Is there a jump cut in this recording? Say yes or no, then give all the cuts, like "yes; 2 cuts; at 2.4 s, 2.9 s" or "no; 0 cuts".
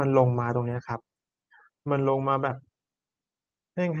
no; 0 cuts